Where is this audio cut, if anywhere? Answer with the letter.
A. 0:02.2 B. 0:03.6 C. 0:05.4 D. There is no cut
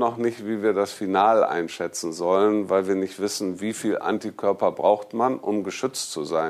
D